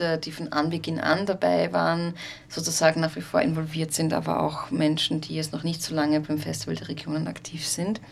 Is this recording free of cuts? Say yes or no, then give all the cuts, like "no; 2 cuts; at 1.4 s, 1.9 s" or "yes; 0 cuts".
yes; 0 cuts